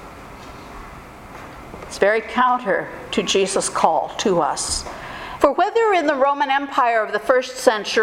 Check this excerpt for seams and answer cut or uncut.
cut